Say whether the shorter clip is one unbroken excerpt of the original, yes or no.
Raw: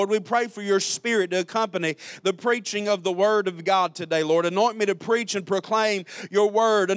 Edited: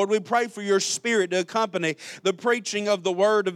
yes